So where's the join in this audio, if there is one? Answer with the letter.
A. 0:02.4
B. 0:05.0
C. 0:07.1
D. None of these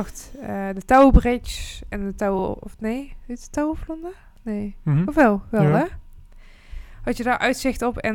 D